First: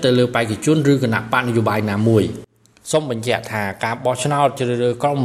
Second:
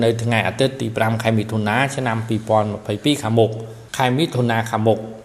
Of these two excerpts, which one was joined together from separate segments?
second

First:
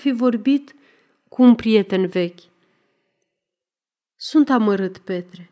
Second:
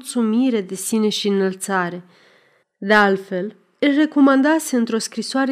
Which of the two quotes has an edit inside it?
second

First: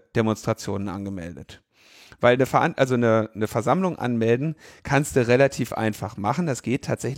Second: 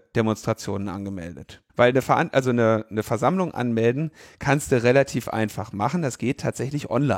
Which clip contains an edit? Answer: second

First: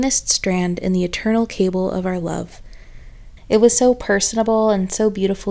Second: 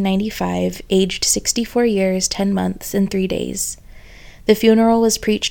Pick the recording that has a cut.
first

